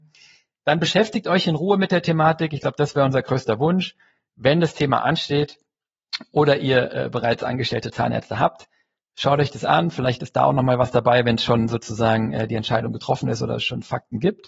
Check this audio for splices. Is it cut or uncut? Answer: uncut